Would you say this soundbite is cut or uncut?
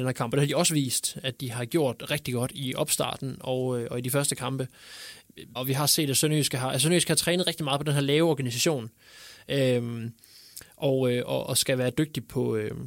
cut